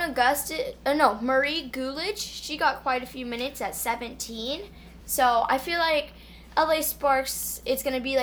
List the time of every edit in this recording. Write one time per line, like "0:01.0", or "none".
none